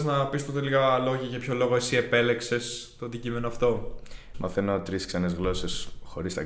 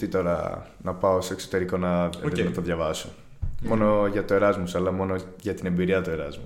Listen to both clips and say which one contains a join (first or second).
first